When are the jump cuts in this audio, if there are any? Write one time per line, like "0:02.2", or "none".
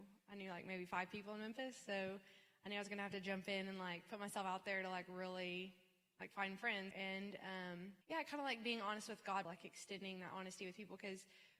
0:06.9
0:08.0
0:09.4